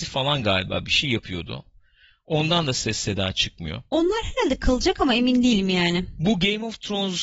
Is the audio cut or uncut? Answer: uncut